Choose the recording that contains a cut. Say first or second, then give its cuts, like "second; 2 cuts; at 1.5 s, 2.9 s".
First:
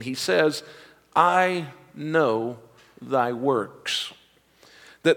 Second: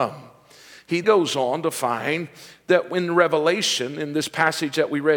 second; 1 cut; at 1.0 s